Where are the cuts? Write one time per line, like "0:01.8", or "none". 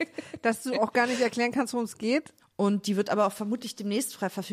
0:02.4

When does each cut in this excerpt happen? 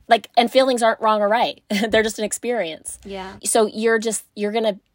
0:03.4

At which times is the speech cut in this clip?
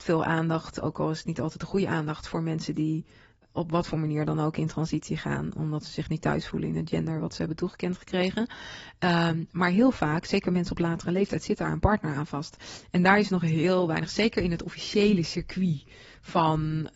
none

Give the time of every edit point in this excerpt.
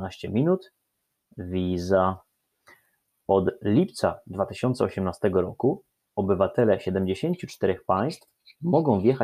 none

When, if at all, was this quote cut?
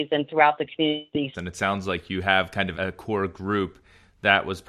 0:01.3
0:02.7

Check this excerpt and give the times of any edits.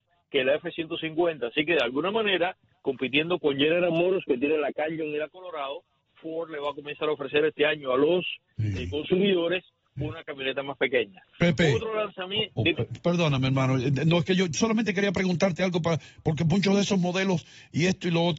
none

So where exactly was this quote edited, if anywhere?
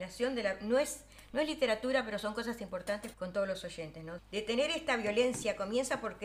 0:03.1
0:04.2

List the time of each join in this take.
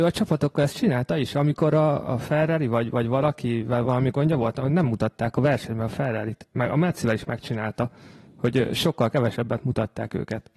none

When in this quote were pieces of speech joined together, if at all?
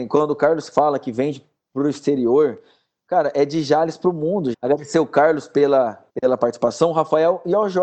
0:04.5
0:06.1

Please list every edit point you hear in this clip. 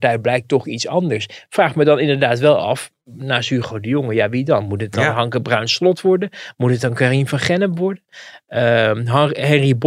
none

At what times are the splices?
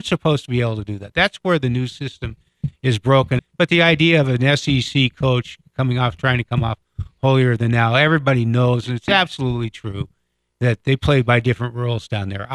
0:03.4

